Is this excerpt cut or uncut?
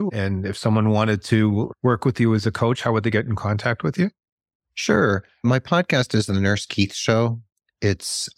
uncut